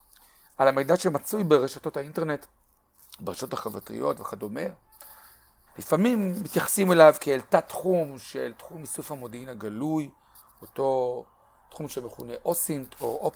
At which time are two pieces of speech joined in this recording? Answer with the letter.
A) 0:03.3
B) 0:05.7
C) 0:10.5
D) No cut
B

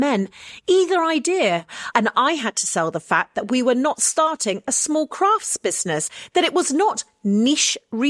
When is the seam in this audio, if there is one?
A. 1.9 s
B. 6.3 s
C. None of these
A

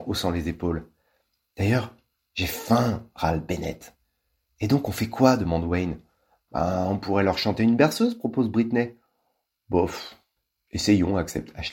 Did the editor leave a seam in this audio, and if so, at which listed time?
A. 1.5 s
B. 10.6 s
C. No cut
C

